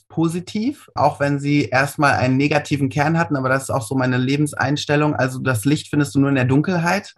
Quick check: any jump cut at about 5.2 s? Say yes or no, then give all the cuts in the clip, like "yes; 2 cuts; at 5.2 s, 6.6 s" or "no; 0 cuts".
no; 1 cut; at 1.0 s